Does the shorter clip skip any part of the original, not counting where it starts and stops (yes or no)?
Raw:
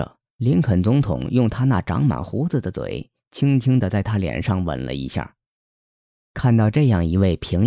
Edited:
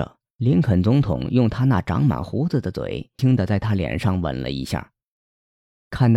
yes